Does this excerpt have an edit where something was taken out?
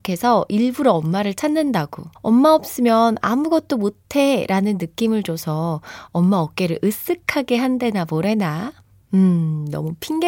yes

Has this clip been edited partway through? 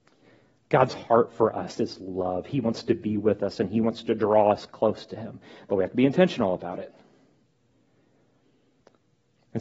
no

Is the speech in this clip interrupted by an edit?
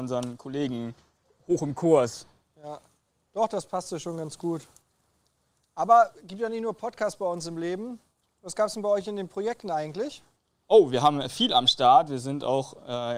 no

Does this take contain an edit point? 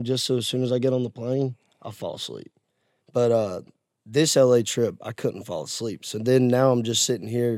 no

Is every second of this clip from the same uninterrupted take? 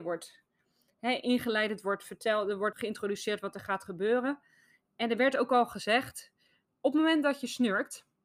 no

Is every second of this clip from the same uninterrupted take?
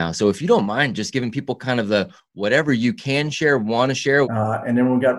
no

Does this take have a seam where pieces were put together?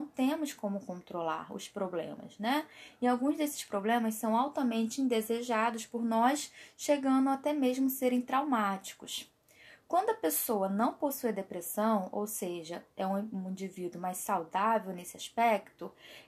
no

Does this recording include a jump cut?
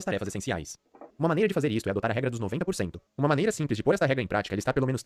yes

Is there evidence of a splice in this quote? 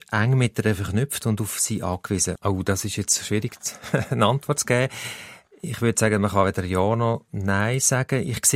yes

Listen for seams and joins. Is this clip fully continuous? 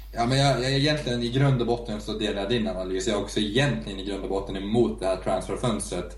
yes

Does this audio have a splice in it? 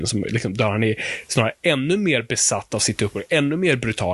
no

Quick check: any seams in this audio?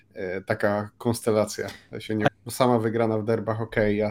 yes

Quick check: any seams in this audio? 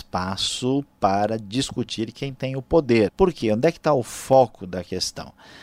yes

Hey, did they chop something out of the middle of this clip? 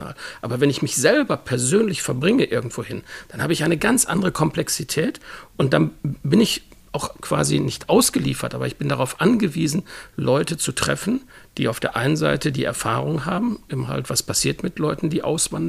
no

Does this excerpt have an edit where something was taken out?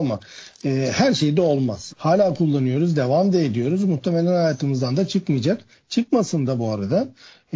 yes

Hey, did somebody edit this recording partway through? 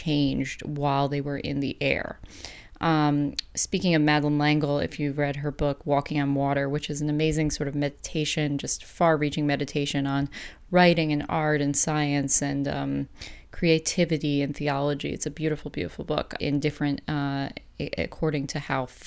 yes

